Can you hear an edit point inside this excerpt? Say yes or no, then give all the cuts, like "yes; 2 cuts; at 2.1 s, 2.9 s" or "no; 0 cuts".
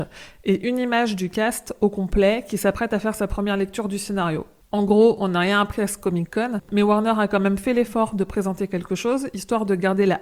no; 0 cuts